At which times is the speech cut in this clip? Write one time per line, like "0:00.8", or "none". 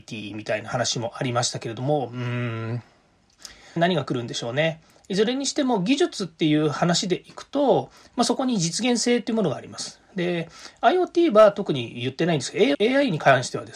0:03.8
0:12.7